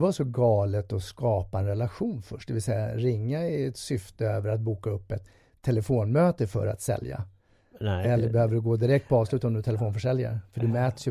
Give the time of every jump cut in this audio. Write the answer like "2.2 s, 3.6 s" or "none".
none